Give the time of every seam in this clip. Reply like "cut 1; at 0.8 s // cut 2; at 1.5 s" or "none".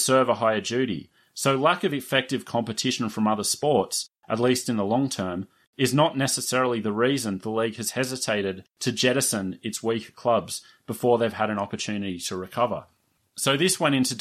none